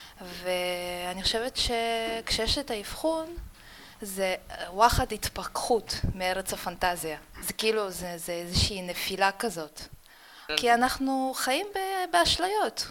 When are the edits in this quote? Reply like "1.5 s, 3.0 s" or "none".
10.5 s